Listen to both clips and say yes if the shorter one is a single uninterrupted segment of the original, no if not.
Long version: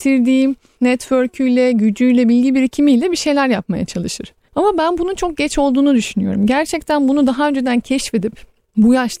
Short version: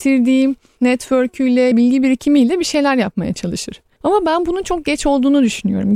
no